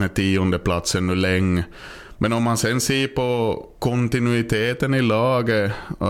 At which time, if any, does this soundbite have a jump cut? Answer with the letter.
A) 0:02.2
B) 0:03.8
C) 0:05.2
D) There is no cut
B